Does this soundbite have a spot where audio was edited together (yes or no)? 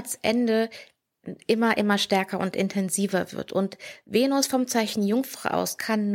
no